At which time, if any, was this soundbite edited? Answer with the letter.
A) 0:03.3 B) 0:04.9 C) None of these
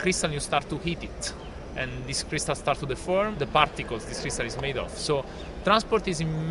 A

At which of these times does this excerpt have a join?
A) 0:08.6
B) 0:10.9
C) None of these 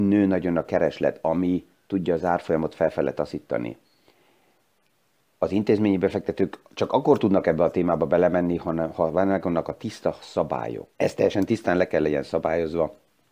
B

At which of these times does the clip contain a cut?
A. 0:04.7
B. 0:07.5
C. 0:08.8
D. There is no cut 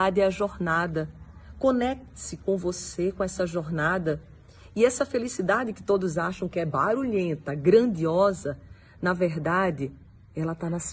D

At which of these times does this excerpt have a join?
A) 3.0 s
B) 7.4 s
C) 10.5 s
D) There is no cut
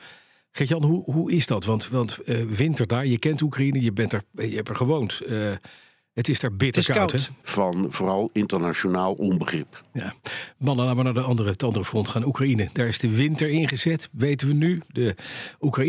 B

